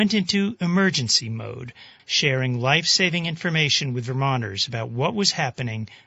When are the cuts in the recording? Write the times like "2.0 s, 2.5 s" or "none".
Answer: 2.0 s